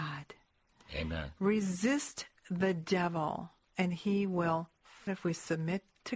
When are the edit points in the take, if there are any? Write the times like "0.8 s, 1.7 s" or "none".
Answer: 5.1 s